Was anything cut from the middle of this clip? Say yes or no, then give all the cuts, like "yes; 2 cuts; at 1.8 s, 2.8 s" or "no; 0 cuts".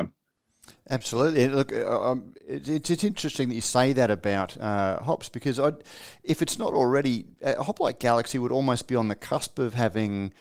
no; 0 cuts